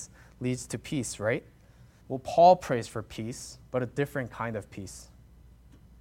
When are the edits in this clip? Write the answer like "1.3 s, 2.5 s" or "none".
2.0 s, 3.7 s